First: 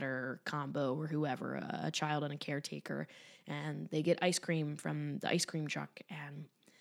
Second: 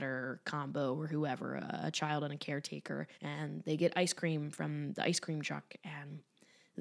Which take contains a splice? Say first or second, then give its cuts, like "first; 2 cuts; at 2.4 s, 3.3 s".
second; 1 cut; at 3.1 s